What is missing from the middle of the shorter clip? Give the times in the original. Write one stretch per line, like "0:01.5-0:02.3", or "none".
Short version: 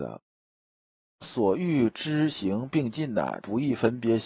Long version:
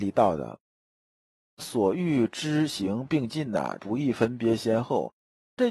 none